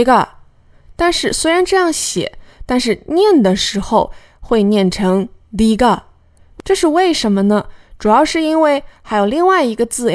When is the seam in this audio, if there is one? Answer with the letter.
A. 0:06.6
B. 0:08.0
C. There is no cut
C